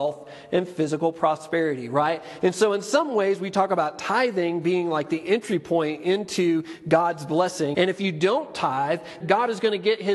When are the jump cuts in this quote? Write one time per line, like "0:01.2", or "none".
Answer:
0:07.7
0:09.2